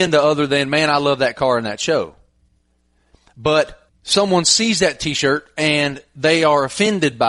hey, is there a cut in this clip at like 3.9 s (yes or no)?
yes